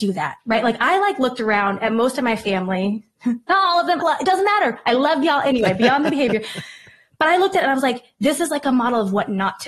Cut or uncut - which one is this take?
cut